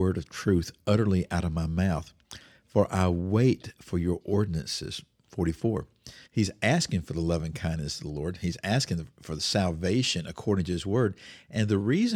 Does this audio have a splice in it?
yes; 1 cut; at 6.2 s

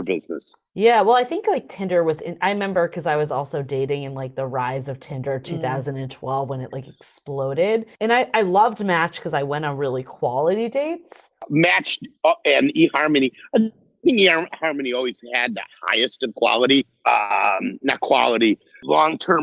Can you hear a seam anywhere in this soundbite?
no; 0 cuts

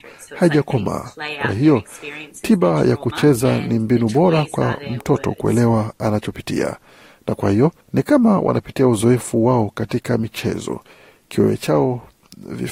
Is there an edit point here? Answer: yes; 1 cut; at 7.8 s

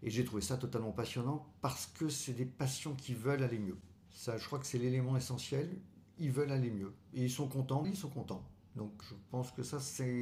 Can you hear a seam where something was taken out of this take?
yes; 2 cuts; at 7.8 s, 9.0 s

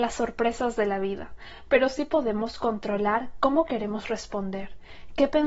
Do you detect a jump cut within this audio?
no; 0 cuts

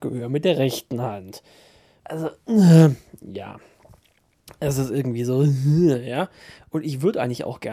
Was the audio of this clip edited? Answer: yes; 1 cut; at 2.0 s

